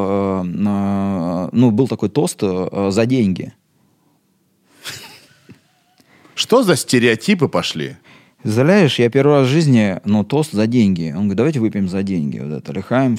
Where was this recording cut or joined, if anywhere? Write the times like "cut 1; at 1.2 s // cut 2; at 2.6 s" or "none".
none